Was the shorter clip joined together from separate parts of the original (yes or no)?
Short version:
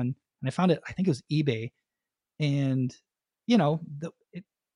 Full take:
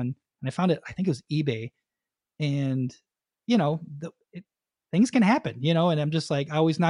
no